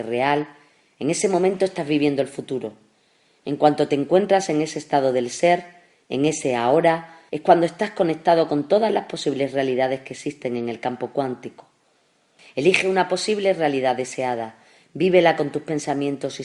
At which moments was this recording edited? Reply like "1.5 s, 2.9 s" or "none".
7.3 s, 12.4 s